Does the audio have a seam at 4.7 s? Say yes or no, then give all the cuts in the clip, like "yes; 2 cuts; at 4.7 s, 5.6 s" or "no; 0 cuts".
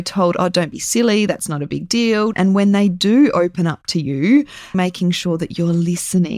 yes; 2 cuts; at 2.3 s, 4.7 s